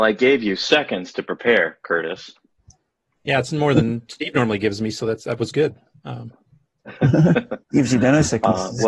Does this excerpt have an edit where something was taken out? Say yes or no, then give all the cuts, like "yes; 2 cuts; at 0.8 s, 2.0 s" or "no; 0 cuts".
yes; 1 cut; at 7.6 s